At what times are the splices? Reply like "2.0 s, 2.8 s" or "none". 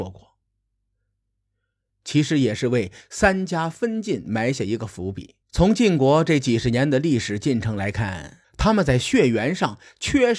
1.9 s, 5.4 s, 8.4 s